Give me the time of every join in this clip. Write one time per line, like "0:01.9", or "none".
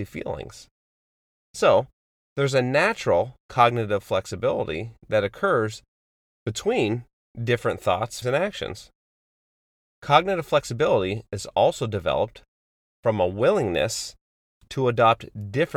0:08.2